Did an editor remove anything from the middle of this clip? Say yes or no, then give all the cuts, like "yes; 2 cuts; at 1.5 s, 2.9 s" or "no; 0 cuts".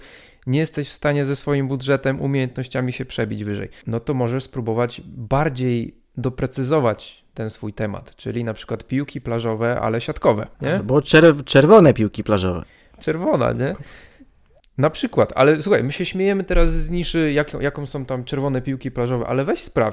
yes; 1 cut; at 12.9 s